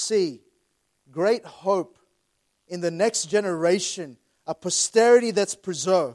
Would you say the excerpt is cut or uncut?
uncut